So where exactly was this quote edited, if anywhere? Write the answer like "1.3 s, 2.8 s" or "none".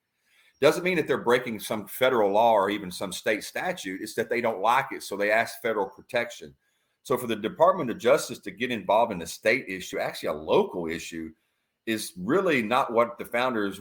none